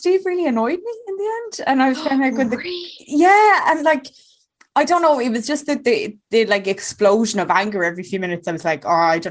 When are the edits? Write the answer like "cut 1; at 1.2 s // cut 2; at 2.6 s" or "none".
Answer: none